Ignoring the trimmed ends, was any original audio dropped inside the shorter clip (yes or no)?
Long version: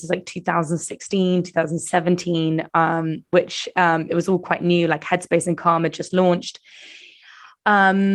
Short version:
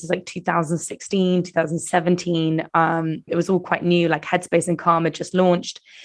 yes